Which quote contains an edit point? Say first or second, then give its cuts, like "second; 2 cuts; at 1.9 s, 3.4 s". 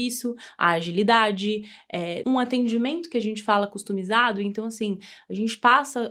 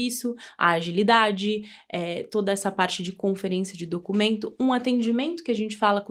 first; 1 cut; at 2.2 s